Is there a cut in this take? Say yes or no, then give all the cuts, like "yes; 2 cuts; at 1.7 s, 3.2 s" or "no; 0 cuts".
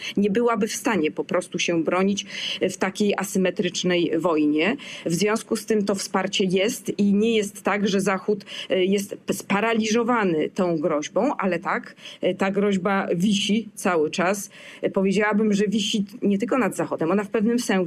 no; 0 cuts